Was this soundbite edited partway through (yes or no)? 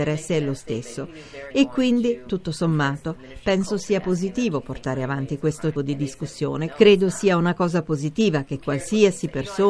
yes